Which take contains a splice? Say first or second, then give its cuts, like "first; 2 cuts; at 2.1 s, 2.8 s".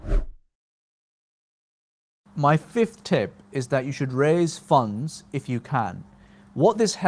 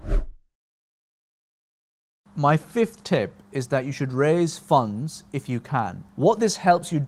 second; 1 cut; at 6.1 s